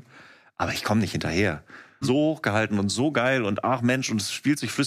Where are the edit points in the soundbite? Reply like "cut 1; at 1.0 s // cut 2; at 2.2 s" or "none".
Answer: cut 1; at 2.0 s